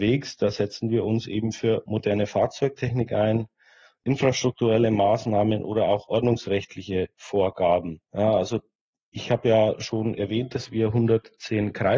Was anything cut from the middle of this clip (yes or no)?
yes